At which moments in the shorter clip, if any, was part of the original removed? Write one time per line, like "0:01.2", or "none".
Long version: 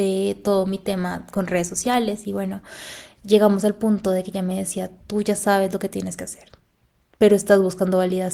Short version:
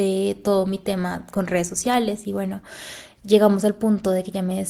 none